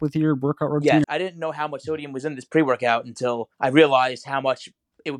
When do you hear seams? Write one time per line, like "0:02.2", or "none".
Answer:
0:01.0
0:03.5